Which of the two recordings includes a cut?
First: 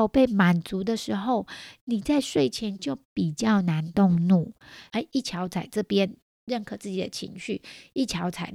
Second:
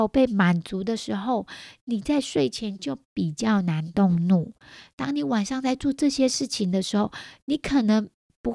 first; 1 cut; at 4.9 s

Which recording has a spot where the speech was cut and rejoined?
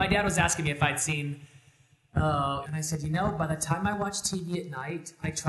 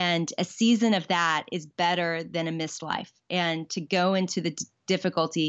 first; 1 cut; at 2.6 s

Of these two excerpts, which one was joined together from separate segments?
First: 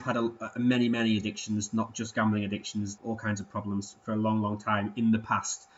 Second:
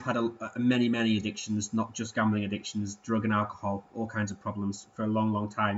first; 1 cut; at 3.0 s

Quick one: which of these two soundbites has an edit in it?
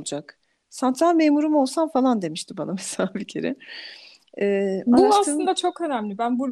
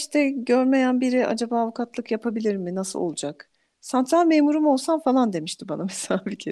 first; 1 cut; at 4.9 s

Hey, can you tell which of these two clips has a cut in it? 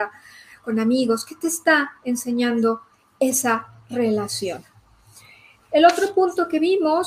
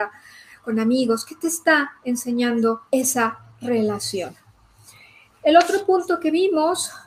second; 1 cut; at 2.9 s

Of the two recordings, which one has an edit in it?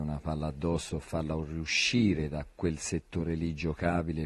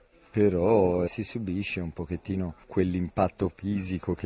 second; 1 cut; at 1.1 s

